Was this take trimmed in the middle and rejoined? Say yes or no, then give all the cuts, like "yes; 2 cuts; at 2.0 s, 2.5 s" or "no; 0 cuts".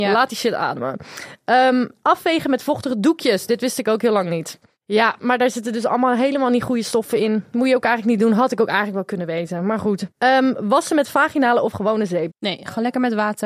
yes; 2 cuts; at 10.1 s, 12.3 s